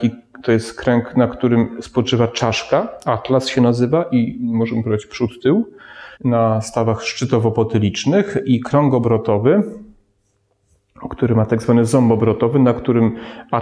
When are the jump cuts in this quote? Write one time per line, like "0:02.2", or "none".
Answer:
0:06.1